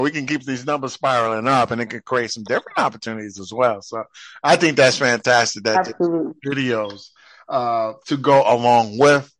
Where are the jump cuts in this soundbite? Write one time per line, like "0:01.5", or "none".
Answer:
none